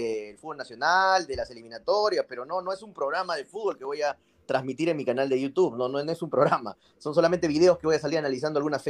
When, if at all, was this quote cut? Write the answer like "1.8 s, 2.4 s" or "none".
none